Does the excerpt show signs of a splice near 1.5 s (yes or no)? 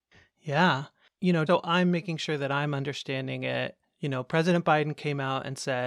yes